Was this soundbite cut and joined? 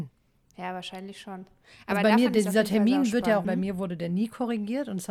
yes; 1 cut; at 3.4 s

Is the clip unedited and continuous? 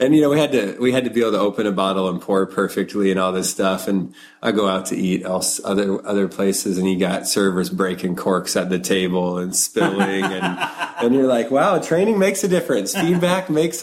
yes; 0 cuts

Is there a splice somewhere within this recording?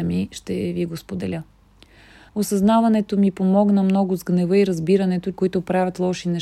yes; 2 cuts; at 2.3 s, 5.3 s

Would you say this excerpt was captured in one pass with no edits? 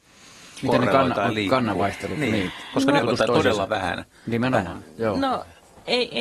no; 1 cut; at 3.0 s

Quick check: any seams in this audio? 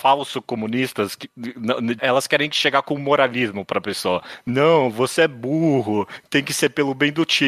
yes; 1 cut; at 2.0 s

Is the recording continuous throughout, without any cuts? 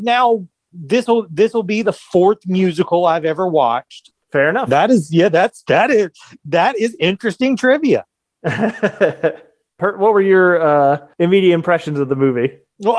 no; 1 cut; at 4.1 s

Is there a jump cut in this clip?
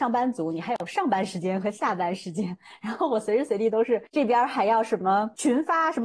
no; 0 cuts

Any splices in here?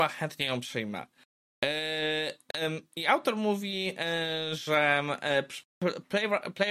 no; 0 cuts

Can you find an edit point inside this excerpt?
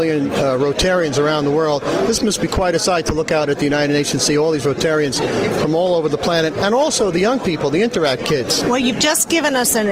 yes; 1 cut; at 8.6 s

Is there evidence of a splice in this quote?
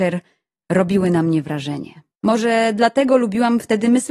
yes; 1 cut; at 2.1 s

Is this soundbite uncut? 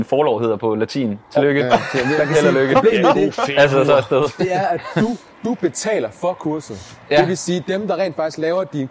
yes; 0 cuts

